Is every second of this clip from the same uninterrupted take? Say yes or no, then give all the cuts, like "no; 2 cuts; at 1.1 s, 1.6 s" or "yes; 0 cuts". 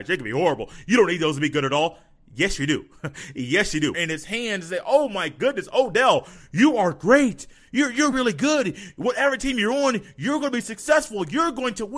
no; 2 cuts; at 3.9 s, 8.1 s